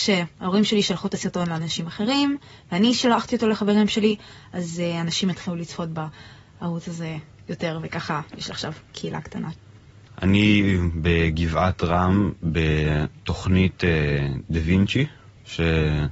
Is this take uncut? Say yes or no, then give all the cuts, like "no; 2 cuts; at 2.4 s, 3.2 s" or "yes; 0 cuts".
yes; 0 cuts